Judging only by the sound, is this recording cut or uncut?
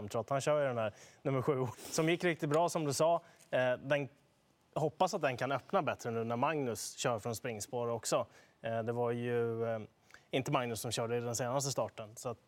cut